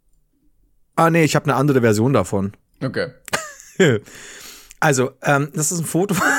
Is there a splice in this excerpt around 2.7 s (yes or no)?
yes